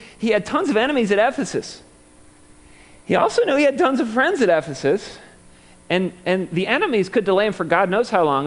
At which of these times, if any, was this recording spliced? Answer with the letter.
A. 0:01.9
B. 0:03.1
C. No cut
C